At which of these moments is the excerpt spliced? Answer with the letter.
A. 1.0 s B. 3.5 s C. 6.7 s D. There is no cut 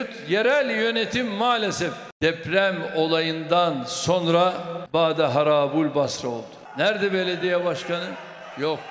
D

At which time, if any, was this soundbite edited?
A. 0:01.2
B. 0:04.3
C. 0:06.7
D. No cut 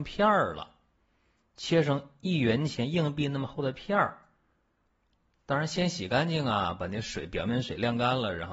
D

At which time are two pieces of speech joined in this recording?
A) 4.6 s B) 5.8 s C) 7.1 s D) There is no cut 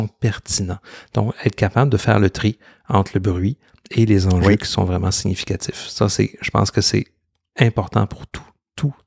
D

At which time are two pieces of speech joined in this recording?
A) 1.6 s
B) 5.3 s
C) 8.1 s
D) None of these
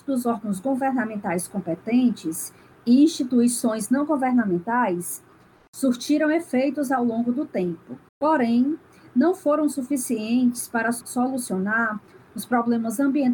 C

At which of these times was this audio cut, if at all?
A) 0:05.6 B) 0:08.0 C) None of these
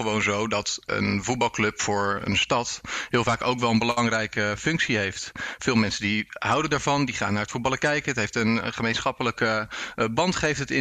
C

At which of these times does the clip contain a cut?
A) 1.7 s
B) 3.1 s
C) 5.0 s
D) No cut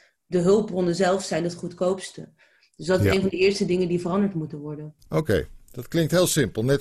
C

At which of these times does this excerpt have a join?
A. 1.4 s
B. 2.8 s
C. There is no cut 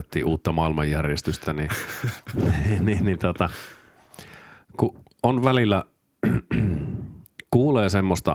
C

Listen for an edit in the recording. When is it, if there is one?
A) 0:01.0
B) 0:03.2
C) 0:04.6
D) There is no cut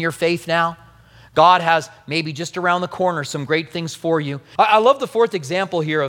C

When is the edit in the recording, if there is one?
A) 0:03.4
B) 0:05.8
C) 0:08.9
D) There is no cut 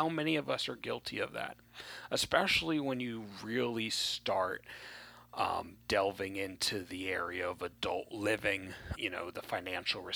C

